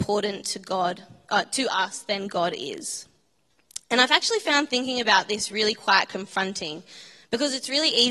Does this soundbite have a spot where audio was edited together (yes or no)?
no